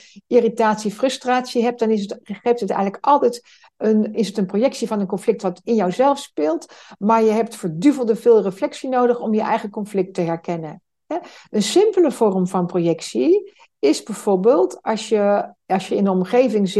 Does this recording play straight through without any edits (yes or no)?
no